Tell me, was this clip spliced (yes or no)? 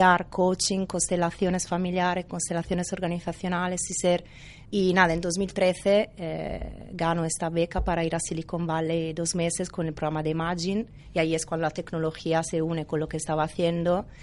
yes